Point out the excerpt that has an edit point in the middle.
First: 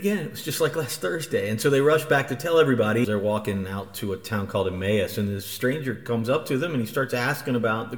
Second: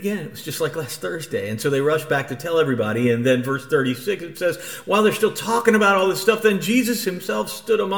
first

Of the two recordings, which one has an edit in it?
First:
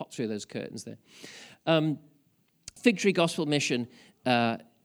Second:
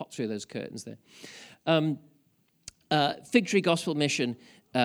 first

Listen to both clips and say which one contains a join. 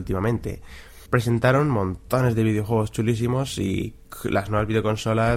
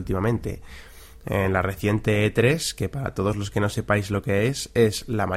first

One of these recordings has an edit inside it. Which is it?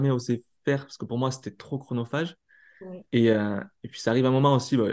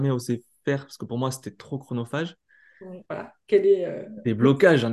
second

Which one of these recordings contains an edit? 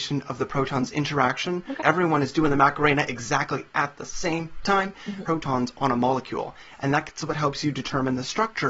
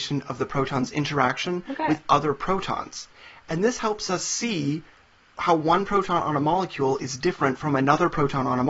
first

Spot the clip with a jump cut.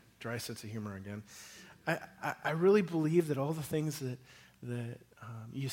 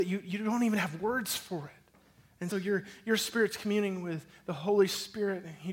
second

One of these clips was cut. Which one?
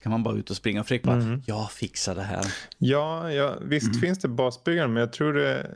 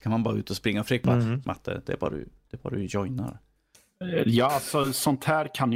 second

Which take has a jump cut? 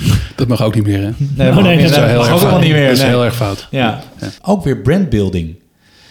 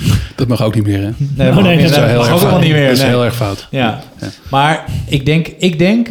first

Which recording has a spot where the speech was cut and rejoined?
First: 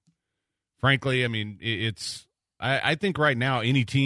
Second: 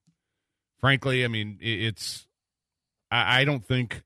first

